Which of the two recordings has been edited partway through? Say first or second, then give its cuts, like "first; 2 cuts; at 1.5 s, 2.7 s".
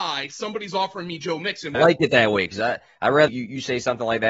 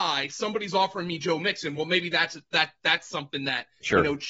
first; 2 cuts; at 1.7 s, 3.3 s